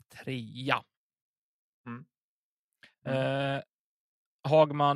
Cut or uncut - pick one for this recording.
cut